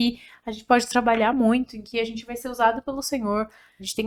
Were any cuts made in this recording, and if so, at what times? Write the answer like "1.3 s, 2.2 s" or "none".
none